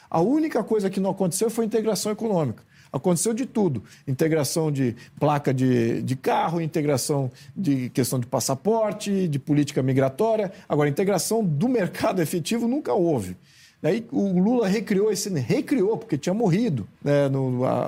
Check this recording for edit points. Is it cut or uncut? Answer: cut